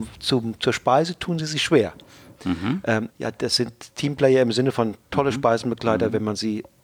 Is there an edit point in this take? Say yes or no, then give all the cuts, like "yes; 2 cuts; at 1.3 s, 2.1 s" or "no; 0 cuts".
yes; 1 cut; at 3.1 s